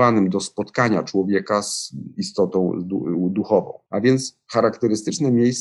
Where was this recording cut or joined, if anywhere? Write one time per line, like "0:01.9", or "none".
0:03.9